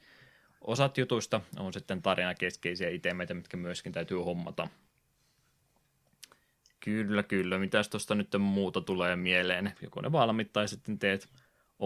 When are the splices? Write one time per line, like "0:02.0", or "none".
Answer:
0:09.7